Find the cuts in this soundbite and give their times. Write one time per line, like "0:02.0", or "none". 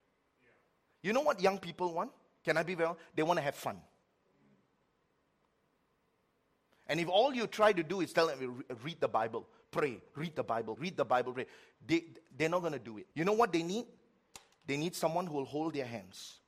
0:10.8
0:13.1

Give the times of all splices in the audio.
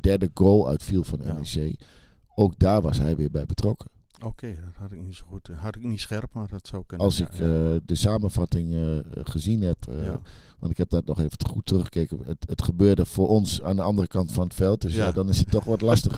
none

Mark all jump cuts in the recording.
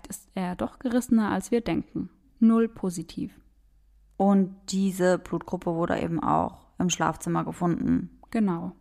0:02.2

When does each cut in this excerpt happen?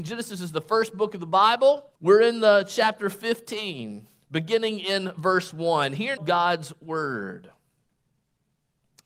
0:02.0
0:06.2

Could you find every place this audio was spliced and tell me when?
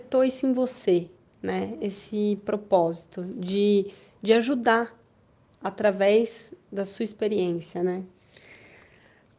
none

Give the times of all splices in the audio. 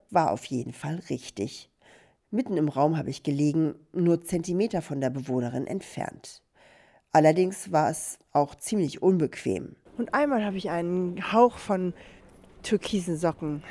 0:09.9

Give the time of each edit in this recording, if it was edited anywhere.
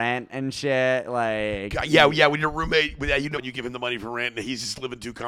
0:03.4

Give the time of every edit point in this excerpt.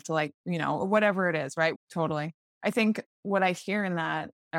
0:01.7

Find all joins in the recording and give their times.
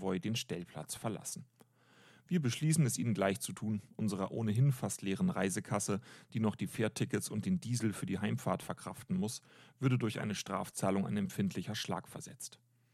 none

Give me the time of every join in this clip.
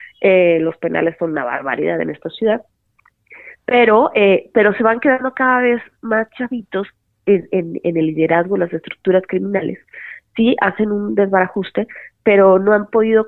none

